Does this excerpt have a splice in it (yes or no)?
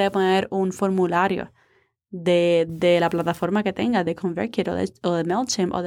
no